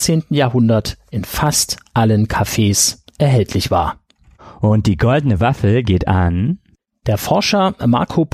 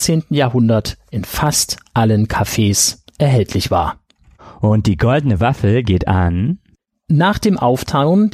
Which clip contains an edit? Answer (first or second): first